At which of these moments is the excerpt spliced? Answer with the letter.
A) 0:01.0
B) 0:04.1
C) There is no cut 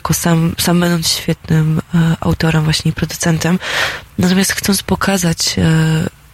A